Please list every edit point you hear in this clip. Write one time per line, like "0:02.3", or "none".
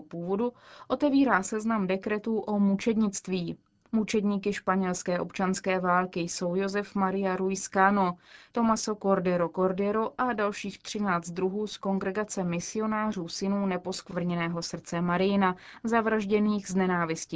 0:03.9
0:08.5